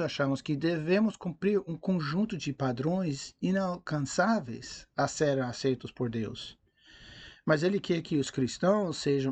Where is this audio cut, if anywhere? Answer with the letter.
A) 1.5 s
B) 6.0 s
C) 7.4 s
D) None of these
C